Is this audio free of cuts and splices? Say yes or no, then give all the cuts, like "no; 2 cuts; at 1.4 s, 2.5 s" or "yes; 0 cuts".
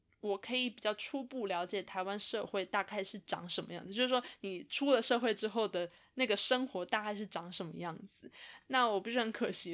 yes; 0 cuts